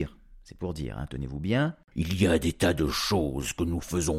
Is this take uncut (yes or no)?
no